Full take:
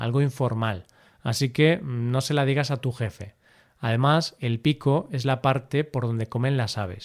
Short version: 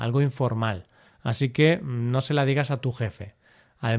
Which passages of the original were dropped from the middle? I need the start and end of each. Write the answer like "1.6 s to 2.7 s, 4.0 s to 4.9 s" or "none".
none